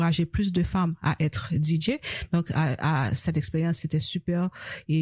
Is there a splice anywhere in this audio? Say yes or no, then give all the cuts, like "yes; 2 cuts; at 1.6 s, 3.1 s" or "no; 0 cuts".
yes; 1 cut; at 3.8 s